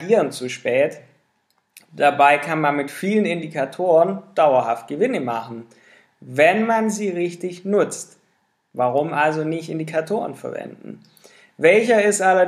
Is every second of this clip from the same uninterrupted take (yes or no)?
yes